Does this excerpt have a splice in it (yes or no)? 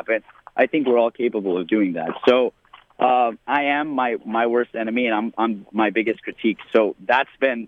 yes